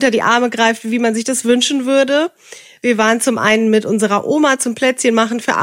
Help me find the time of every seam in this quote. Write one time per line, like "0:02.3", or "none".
0:02.8